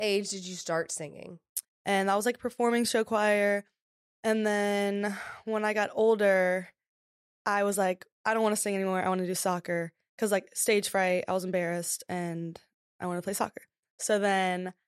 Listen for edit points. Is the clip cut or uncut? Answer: cut